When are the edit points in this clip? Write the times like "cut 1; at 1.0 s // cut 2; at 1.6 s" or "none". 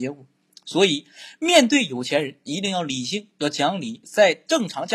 cut 1; at 4.0 s